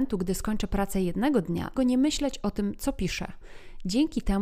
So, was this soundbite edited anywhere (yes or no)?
yes